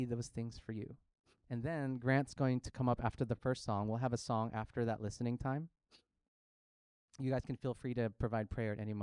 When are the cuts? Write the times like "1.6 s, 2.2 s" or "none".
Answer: 1.3 s